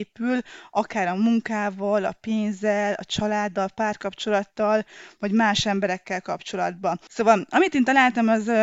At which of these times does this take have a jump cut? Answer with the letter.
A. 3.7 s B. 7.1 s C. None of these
B